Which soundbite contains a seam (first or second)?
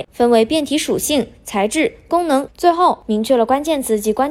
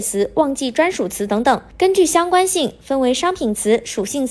first